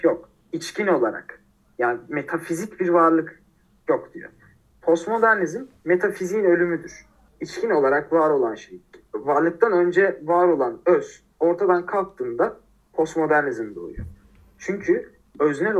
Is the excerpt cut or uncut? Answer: cut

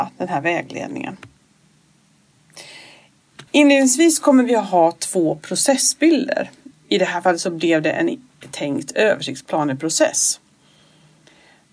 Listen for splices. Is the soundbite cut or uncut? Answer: cut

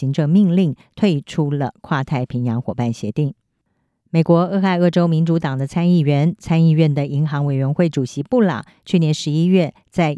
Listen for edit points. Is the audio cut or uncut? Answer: uncut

